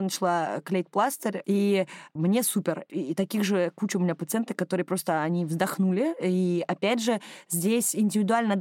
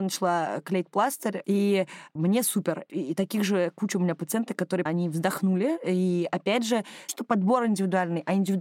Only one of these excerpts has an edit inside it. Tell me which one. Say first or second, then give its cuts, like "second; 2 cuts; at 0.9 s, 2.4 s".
second; 2 cuts; at 4.9 s, 7.1 s